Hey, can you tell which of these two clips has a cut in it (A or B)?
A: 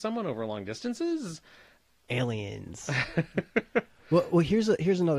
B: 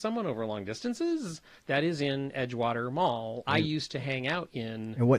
B